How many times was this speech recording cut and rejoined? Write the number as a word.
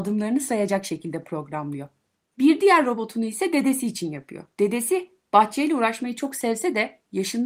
one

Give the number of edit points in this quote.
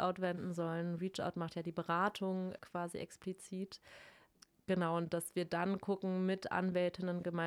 zero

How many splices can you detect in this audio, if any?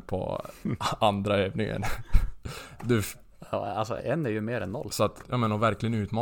two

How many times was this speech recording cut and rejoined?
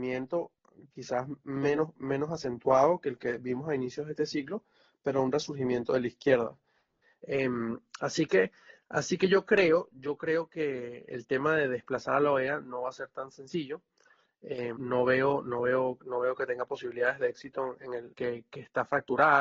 three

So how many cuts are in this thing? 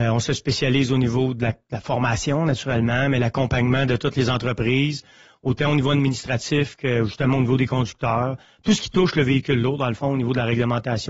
zero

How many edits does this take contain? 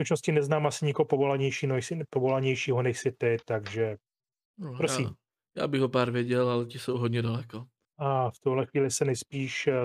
one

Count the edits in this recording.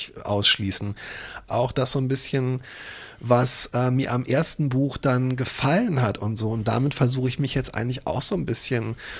one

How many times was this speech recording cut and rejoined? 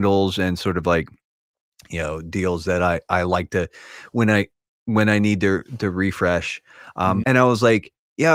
one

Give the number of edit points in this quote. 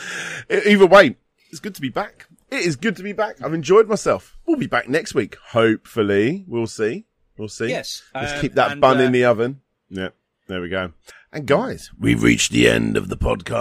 one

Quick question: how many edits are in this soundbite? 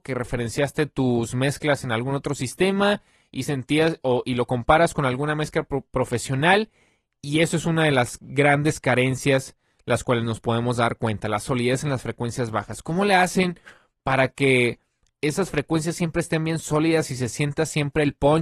zero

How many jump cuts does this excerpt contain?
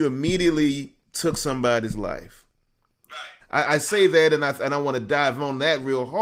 two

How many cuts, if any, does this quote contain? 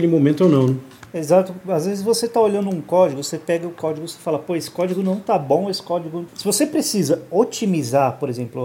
zero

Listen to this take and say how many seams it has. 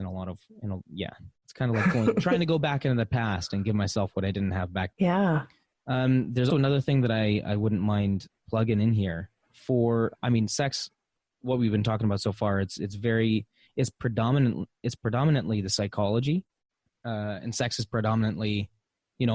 two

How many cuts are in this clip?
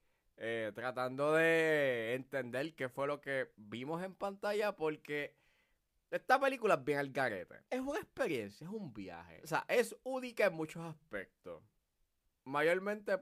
zero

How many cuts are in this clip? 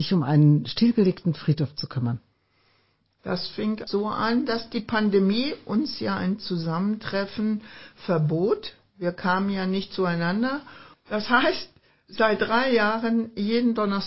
two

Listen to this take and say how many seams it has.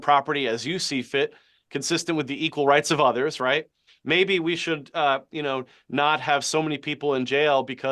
one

